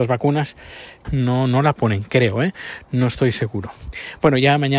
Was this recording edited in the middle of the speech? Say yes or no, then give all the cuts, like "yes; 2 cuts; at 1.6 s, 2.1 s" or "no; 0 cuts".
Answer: yes; 1 cut; at 1.0 s